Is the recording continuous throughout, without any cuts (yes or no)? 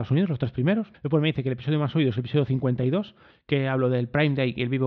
no